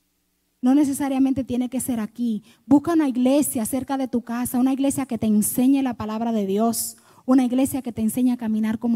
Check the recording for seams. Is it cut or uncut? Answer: uncut